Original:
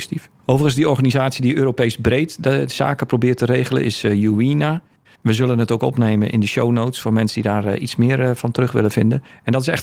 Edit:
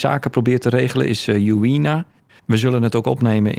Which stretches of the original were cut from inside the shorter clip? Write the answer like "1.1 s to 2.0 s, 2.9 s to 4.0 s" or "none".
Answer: none

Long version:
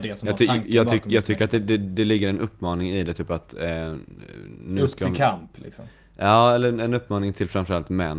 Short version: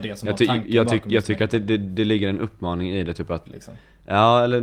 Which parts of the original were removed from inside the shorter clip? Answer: 3.5 s to 5.6 s

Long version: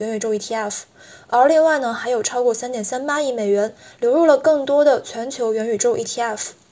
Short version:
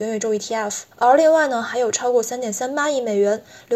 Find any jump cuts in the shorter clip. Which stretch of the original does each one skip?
0.9 s to 1.2 s

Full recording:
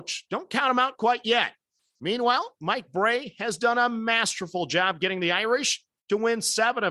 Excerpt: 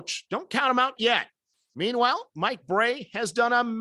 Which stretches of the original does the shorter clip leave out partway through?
1.0 s to 1.2 s

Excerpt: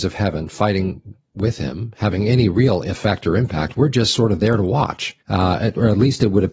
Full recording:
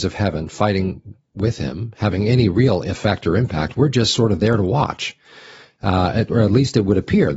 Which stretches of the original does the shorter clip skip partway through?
5.2 s to 5.7 s

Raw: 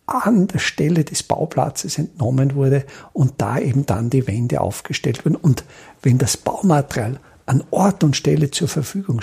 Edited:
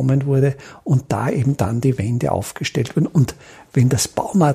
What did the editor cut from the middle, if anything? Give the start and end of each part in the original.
none

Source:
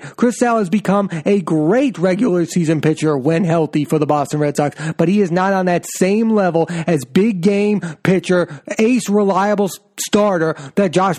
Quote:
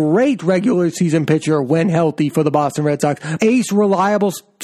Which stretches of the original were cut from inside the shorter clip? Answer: 4.9 s to 8.8 s

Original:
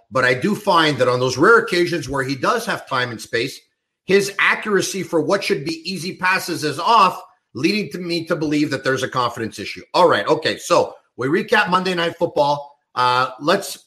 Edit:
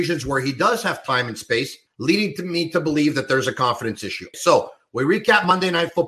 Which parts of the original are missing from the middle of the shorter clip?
3.7 s to 7.4 s, 9.9 s to 10.6 s

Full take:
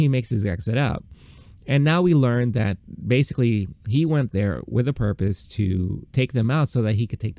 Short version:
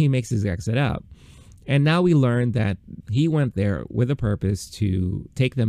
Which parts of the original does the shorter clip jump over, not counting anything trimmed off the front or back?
3.0 s to 3.8 s

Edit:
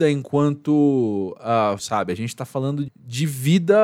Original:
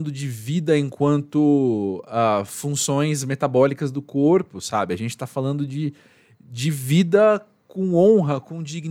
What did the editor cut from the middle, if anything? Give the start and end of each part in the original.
2.5 s to 4.6 s, 5.7 s to 6.3 s

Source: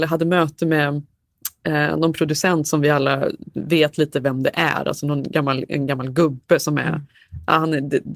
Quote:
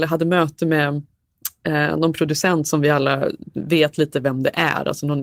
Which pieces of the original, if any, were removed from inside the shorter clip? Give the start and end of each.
none

